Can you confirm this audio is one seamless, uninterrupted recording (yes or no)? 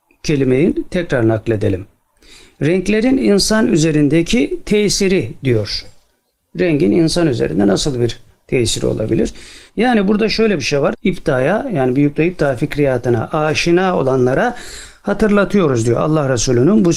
no